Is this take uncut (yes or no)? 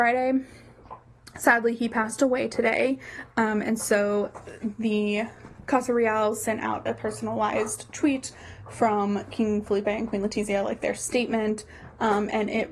yes